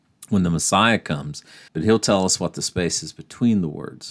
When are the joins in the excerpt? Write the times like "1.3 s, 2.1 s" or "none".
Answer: 1.7 s